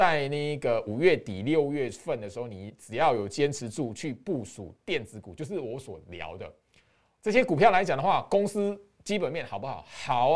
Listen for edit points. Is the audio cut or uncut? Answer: uncut